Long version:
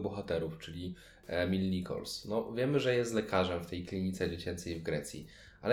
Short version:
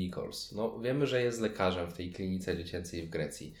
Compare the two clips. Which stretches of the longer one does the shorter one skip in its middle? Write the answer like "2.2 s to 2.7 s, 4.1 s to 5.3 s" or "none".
none